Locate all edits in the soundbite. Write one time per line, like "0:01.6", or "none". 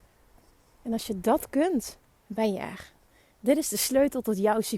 none